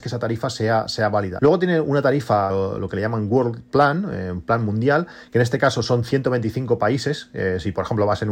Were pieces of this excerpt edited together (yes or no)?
yes